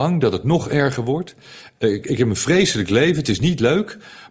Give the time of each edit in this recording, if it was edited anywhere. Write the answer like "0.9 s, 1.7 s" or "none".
1.7 s